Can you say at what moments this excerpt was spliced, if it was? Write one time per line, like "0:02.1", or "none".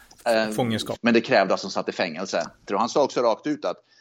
0:01.0
0:02.7